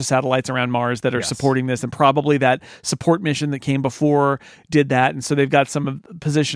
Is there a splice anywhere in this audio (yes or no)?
no